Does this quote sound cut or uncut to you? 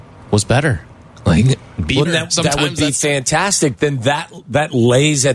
cut